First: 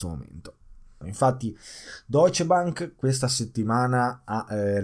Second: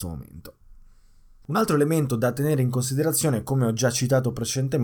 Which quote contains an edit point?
first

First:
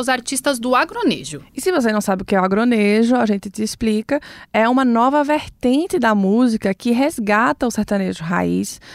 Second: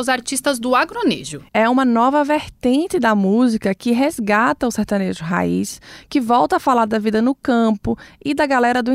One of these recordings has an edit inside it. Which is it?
second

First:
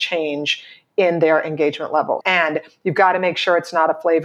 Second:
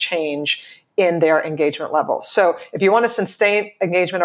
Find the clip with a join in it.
first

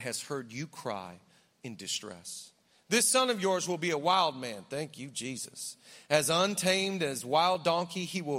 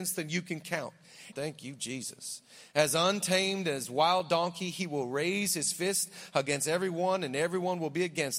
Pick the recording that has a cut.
second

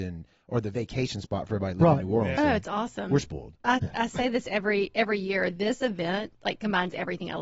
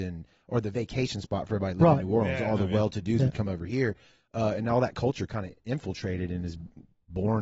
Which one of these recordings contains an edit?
first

